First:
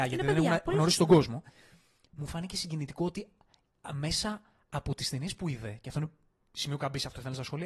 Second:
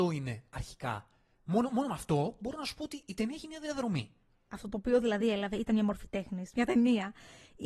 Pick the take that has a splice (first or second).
second